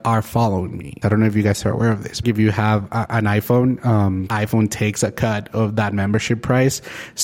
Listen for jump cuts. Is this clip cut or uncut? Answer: cut